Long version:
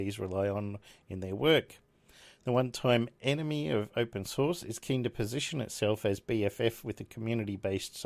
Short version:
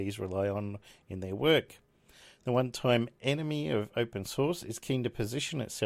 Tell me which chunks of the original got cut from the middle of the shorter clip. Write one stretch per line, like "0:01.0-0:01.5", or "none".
none